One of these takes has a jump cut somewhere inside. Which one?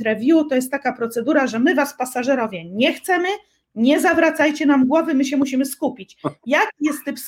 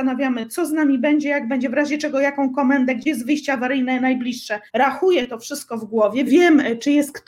second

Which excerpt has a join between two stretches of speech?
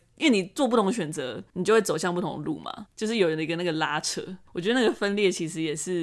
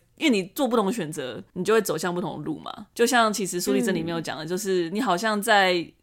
first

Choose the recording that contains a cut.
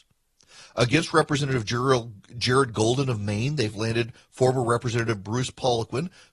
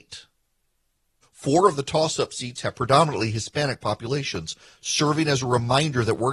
second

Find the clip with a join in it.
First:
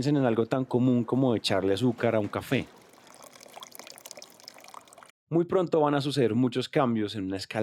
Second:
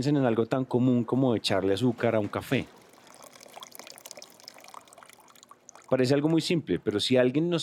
first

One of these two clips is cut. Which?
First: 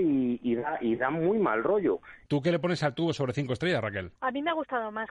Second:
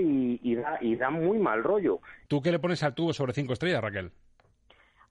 first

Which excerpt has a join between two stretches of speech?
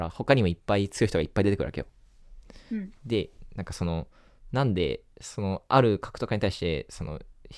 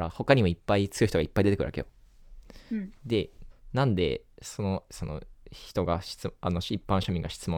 second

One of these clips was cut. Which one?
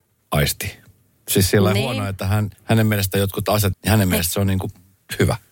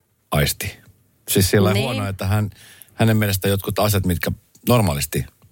first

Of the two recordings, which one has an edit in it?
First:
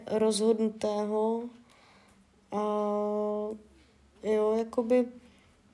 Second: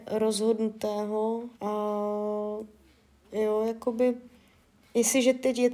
second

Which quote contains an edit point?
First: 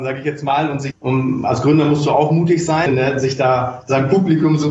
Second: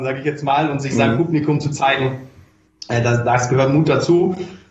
first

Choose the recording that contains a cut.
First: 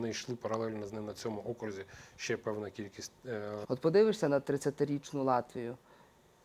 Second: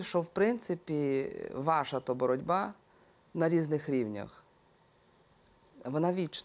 first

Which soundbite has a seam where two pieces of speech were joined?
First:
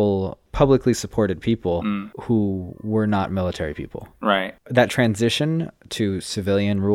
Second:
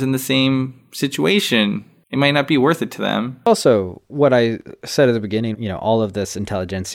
second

